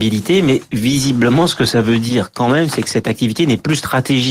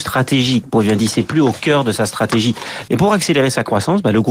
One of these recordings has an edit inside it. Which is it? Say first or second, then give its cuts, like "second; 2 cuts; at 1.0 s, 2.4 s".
second; 1 cut; at 2.9 s